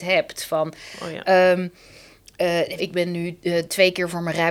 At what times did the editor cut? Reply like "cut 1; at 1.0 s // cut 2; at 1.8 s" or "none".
cut 1; at 2.8 s